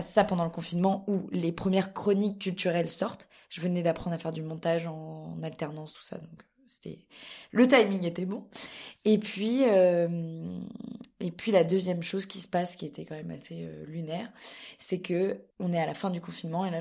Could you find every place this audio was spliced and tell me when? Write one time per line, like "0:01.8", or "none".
0:15.5